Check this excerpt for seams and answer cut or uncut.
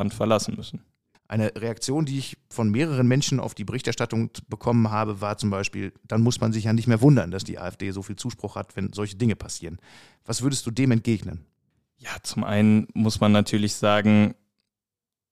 cut